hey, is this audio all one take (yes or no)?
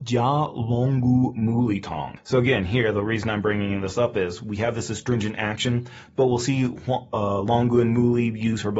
no